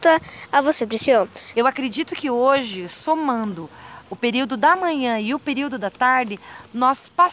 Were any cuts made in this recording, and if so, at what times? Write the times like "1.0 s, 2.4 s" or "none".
1.5 s